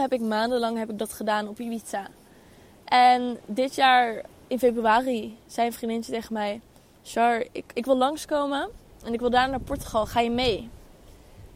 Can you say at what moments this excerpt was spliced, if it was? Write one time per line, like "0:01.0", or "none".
0:07.7